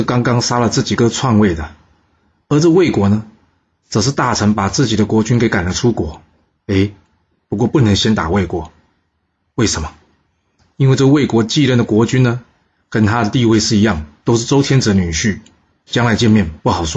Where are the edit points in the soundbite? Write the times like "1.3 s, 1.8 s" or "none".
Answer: 1.0 s, 6.6 s